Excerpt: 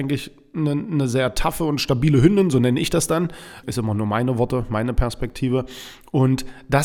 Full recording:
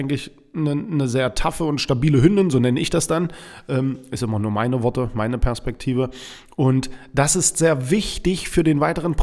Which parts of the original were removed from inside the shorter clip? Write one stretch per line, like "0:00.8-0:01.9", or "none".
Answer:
0:03.6-0:04.1